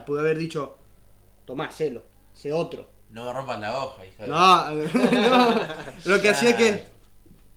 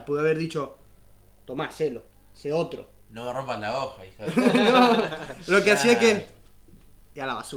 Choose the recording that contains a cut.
second; 1 cut; at 4.3 s

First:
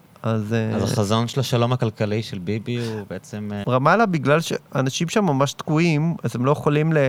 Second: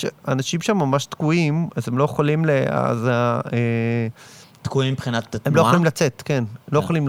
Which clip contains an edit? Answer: first; 1 cut; at 3.6 s

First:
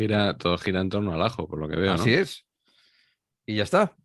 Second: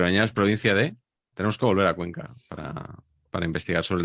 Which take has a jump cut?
second; 1 cut; at 1.3 s

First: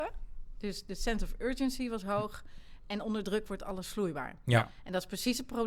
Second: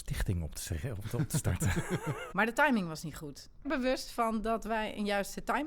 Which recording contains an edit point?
second; 2 cuts; at 2.3 s, 3.6 s

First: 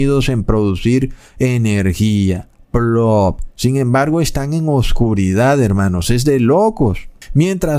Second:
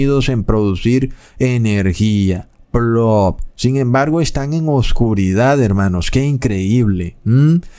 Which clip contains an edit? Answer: second; 1 cut; at 6.0 s

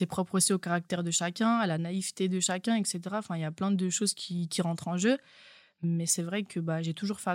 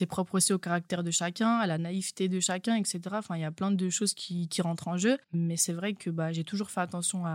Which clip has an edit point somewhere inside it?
second; 1 cut; at 5.2 s

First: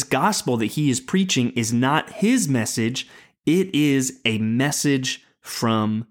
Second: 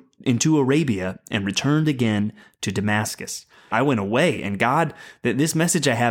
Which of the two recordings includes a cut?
second; 1 cut; at 3.7 s

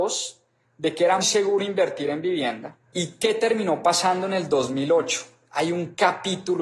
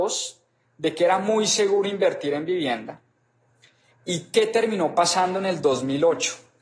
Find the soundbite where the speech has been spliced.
first; 2 cuts; at 1.2 s, 2.8 s

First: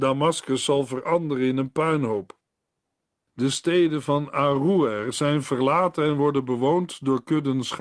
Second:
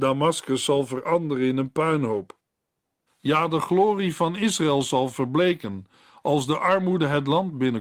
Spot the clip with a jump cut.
second; 1 cut; at 3.1 s

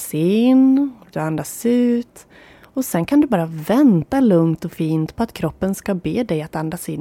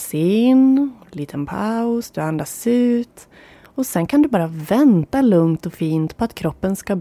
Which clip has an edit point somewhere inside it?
first; 1 cut; at 1.1 s

